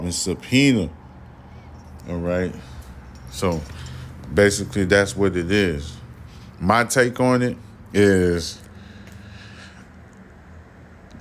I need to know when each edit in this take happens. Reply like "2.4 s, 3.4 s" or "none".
none